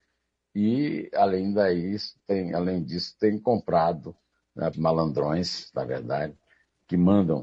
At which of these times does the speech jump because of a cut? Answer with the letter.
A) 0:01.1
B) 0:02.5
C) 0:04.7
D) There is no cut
C